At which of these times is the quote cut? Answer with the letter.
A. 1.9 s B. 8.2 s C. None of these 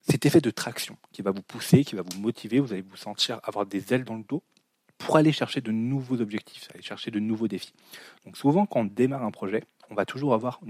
C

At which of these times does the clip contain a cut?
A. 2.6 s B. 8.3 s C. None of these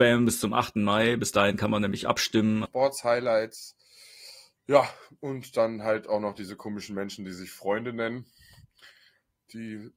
A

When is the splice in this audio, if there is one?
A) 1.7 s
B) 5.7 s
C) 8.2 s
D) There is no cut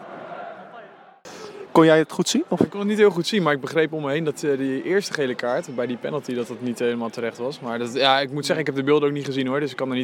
A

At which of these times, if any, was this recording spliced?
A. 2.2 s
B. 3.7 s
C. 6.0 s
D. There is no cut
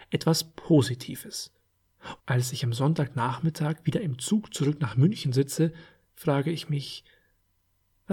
A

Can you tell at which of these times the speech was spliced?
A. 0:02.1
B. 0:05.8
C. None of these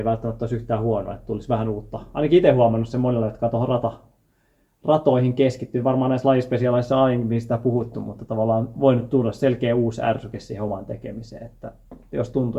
C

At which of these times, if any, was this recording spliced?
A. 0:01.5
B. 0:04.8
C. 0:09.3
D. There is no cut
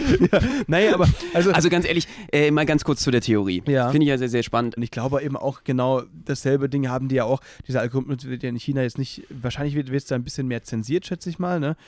B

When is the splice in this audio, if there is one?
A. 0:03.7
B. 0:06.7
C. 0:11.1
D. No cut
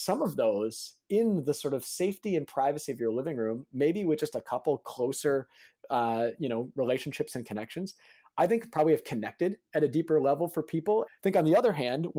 C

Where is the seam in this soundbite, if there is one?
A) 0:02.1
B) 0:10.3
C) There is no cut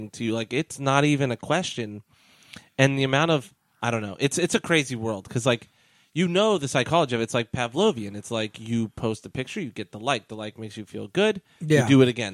C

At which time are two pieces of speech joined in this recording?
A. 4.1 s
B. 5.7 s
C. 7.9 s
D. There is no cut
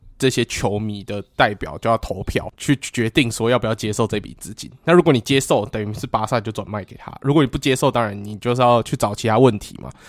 D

